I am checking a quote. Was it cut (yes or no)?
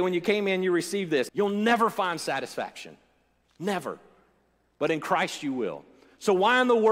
yes